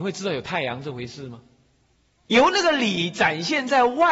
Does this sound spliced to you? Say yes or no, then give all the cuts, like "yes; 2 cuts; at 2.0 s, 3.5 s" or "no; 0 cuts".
yes; 1 cut; at 2.2 s